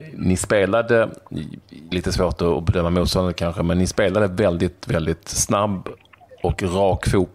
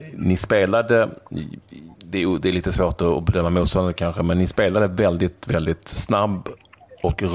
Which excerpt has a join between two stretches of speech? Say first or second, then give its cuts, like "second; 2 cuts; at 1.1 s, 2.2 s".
first; 1 cut; at 1.9 s